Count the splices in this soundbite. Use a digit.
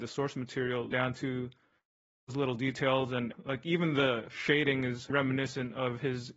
3